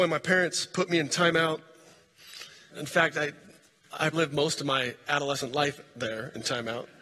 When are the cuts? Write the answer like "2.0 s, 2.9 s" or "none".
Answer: 2.7 s, 4.1 s